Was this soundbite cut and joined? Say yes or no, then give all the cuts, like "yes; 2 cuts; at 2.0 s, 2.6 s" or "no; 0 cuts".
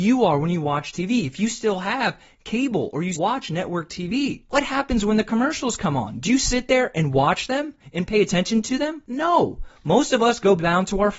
yes; 1 cut; at 3.1 s